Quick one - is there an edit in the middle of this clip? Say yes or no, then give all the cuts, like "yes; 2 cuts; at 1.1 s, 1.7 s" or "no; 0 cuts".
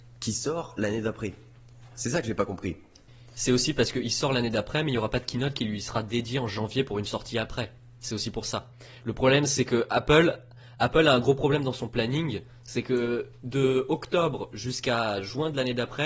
no; 0 cuts